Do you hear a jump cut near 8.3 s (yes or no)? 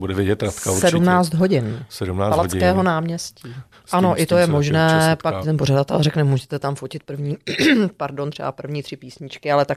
no